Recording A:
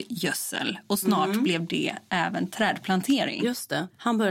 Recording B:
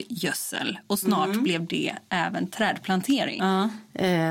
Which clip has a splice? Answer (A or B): B